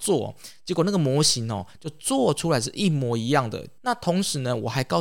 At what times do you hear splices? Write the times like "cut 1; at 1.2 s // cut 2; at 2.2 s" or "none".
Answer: cut 1; at 3.8 s